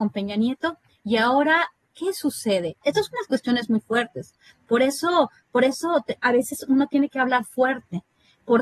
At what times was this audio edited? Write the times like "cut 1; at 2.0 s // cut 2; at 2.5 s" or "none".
cut 1; at 2.8 s